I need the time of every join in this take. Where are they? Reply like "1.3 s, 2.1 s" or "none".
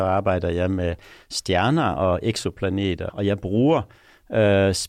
3.1 s

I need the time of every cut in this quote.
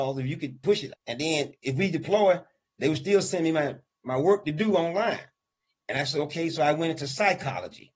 0.9 s

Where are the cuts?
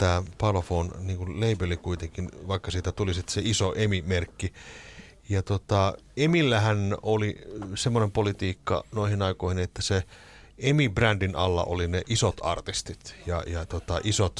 none

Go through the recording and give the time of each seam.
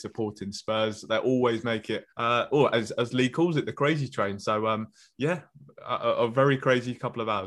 2.1 s

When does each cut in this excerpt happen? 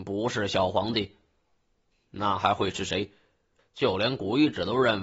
1.9 s, 3.6 s

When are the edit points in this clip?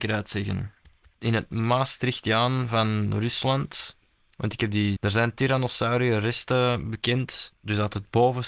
5.0 s

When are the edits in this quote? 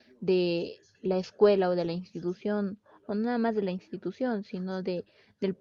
none

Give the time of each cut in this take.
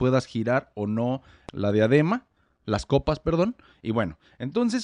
none

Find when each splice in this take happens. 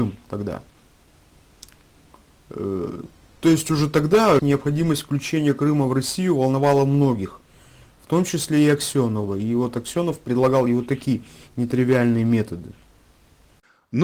4.4 s

